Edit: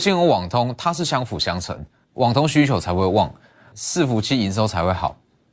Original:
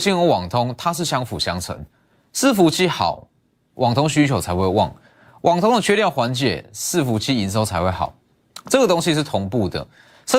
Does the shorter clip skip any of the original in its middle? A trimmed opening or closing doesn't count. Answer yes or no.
yes